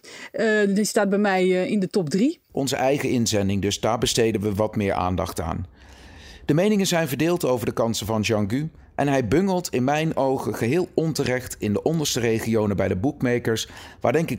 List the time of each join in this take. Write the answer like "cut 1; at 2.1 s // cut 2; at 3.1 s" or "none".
none